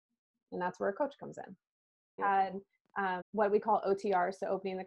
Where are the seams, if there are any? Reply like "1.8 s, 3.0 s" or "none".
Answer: 2.2 s, 3.2 s